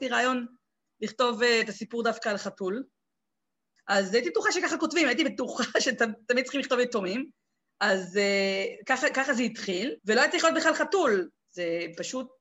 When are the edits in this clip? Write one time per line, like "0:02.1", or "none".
0:03.8
0:10.0
0:11.4